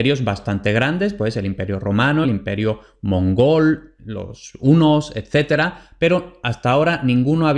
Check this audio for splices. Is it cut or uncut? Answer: cut